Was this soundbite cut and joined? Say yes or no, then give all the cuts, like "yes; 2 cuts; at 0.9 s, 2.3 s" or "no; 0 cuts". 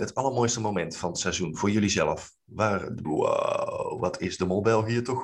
yes; 1 cut; at 3.0 s